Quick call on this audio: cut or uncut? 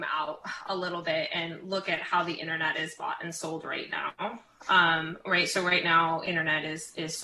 uncut